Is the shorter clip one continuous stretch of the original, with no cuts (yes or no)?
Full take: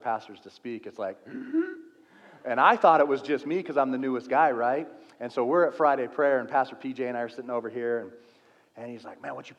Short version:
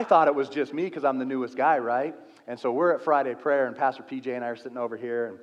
yes